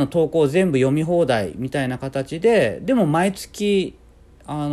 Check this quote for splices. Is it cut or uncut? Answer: uncut